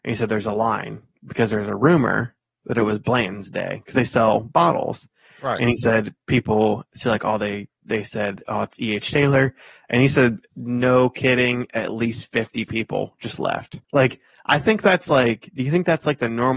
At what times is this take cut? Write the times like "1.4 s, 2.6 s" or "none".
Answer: 13.8 s